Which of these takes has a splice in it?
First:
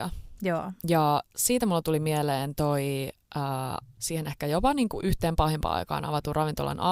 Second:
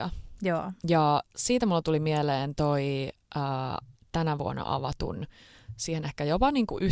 first; 1 cut; at 4.0 s

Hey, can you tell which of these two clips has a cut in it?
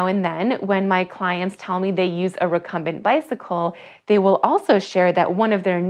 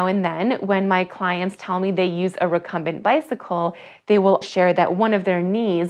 second; 1 cut; at 4.4 s

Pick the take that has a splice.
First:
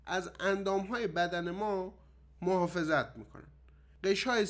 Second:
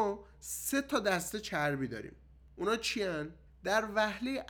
second; 1 cut; at 3.5 s

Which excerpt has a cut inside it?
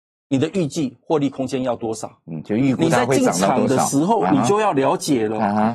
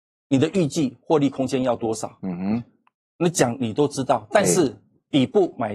second; 1 cut; at 2.2 s

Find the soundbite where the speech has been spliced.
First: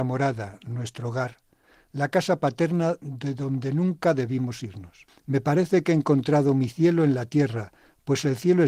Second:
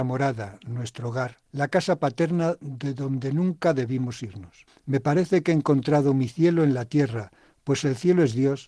second; 1 cut; at 1.5 s

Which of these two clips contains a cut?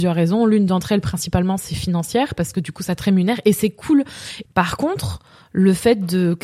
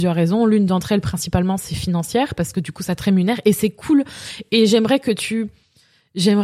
first; 1 cut; at 4.5 s

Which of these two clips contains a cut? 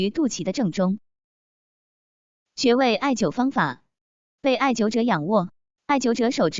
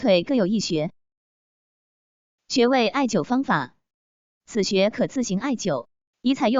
first; 1 cut; at 4.4 s

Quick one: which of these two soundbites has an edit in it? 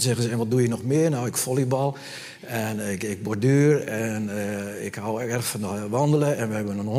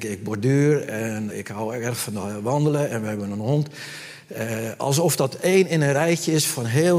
second; 1 cut; at 1.3 s

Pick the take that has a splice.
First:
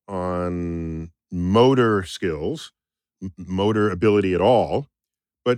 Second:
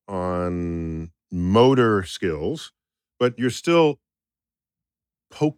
second; 1 cut; at 3.1 s

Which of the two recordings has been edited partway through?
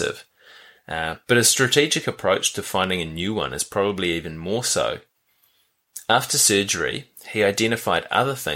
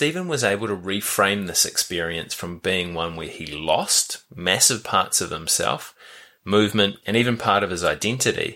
second; 1 cut; at 7.0 s

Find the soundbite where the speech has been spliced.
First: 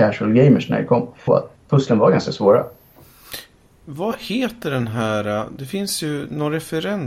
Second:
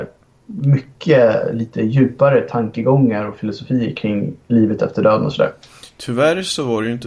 first; 1 cut; at 1.3 s

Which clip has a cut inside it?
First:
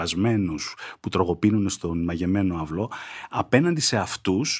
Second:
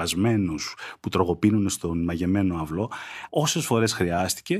second; 1 cut; at 3.3 s

